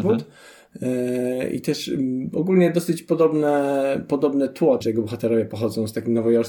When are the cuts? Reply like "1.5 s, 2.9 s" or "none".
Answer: 4.8 s